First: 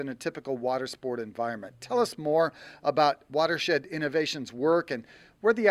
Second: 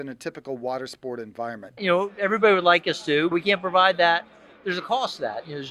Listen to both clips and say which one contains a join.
second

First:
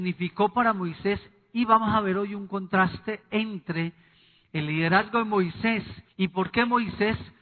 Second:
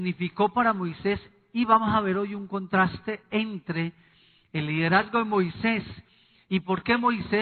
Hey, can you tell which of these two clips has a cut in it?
first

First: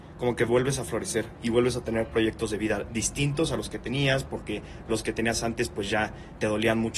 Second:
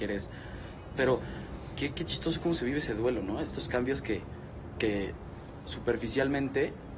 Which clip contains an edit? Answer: second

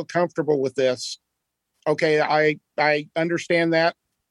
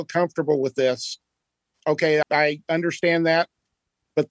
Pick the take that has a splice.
second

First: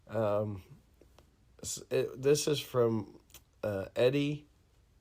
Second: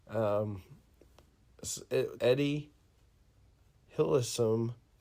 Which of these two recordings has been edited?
second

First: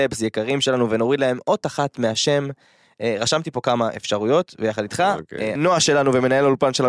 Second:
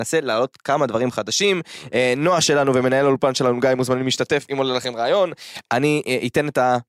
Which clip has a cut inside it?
first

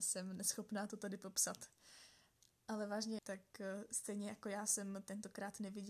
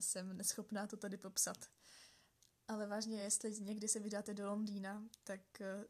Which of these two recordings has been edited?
first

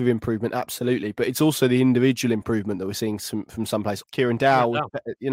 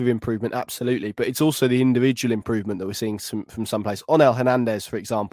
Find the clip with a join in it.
first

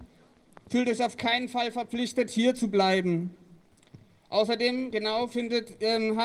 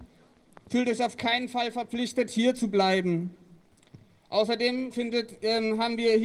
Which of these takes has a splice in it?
second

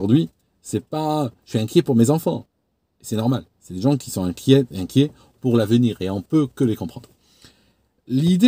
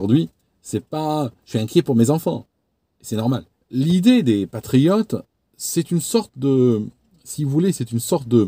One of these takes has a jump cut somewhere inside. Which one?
second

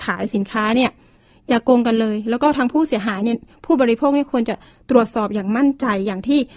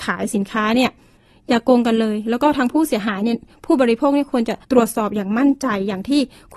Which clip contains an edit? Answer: second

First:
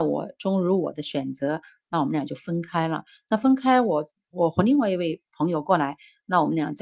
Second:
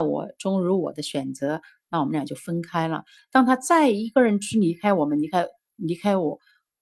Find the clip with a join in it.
second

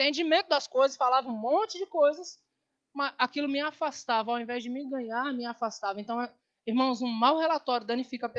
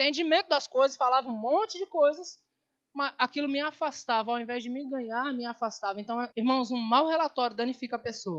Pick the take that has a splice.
second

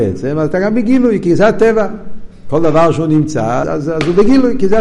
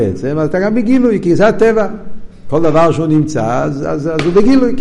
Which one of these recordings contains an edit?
first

